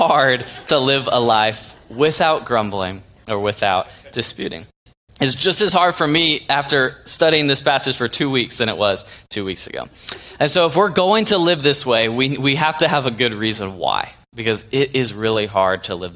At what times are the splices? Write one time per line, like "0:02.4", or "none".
none